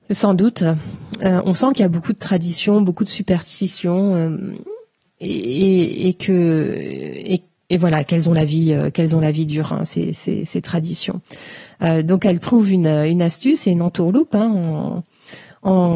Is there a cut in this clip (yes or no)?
no